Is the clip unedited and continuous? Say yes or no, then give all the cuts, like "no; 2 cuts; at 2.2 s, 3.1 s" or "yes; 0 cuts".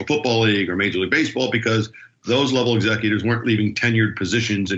yes; 0 cuts